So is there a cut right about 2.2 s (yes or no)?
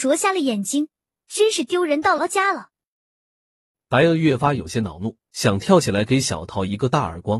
yes